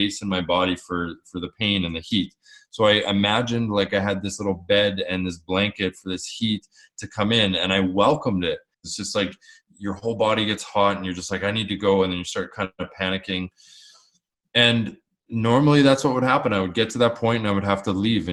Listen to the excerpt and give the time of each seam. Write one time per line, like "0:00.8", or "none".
0:08.7